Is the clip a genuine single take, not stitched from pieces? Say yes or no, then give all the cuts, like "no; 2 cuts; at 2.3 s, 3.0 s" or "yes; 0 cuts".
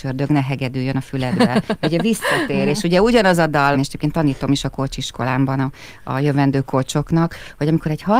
no; 1 cut; at 3.7 s